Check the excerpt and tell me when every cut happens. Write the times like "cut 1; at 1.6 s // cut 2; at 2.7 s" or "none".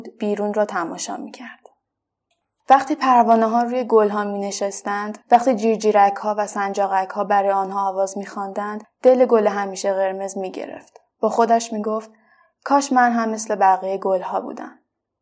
cut 1; at 5.2 s